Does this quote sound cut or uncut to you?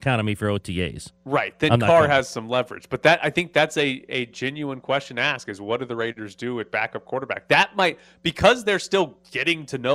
uncut